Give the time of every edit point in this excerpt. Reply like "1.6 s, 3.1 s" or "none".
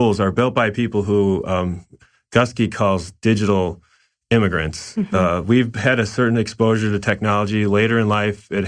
none